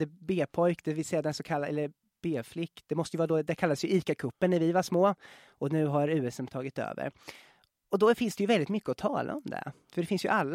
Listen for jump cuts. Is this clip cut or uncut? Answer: uncut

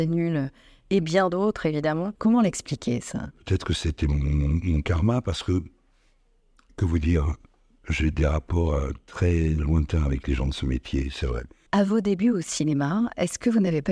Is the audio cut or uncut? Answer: cut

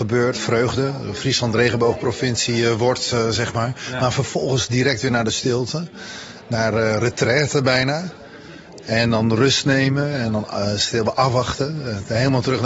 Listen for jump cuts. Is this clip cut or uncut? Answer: uncut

